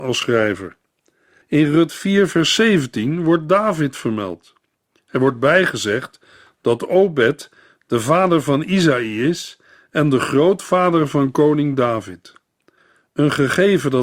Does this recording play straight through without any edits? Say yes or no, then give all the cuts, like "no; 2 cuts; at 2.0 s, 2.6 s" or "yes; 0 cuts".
yes; 0 cuts